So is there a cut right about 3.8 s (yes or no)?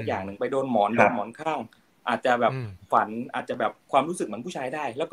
yes